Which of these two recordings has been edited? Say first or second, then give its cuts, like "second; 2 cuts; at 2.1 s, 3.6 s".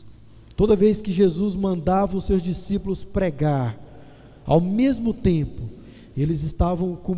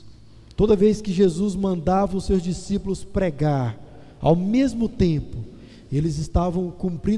second; 1 cut; at 4.1 s